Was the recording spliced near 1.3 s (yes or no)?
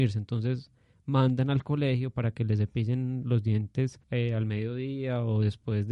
no